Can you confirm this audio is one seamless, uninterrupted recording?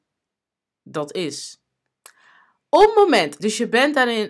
no; 1 cut; at 3.4 s

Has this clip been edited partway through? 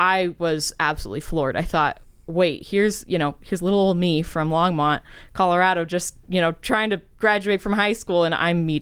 no; 0 cuts

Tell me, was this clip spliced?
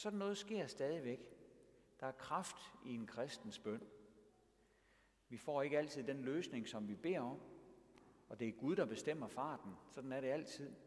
no; 0 cuts

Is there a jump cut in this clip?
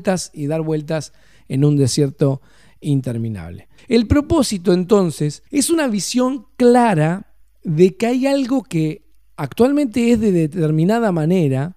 yes; 2 cuts; at 3.8 s, 5.5 s

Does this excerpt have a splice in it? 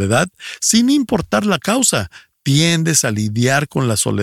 no; 0 cuts

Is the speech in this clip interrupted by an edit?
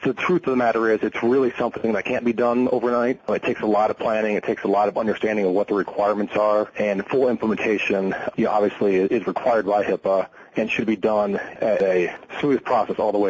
no; 0 cuts

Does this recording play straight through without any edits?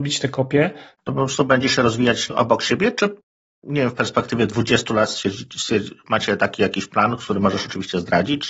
no; 1 cut; at 0.9 s

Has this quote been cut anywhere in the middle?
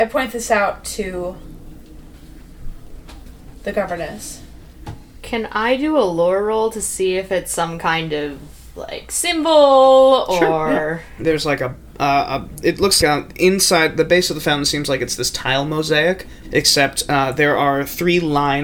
yes; 3 cuts; at 11.2 s, 13.0 s, 16.4 s

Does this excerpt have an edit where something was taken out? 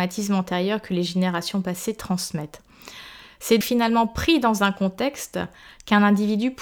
yes; 1 cut; at 3.6 s

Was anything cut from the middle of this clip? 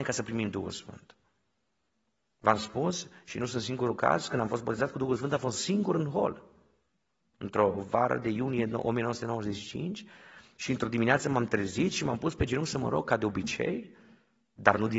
no; 0 cuts

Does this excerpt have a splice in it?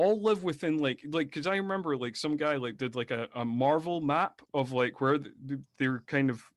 no; 0 cuts

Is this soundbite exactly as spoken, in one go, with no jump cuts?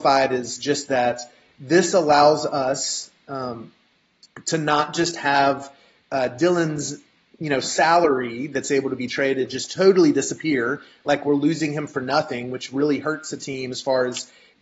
yes; 0 cuts

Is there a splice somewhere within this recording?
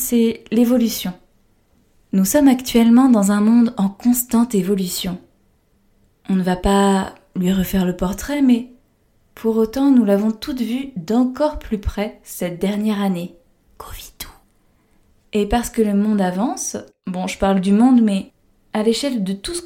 no; 0 cuts

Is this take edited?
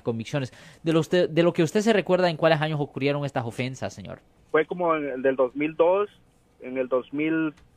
no; 0 cuts

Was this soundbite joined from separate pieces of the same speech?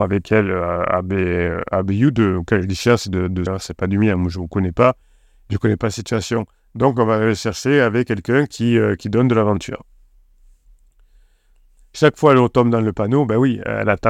yes; 1 cut; at 3.5 s

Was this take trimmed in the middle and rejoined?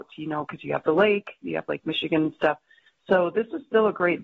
no; 0 cuts

